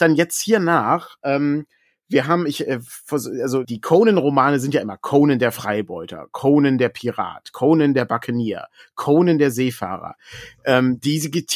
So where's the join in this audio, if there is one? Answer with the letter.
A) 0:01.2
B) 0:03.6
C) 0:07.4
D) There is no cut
B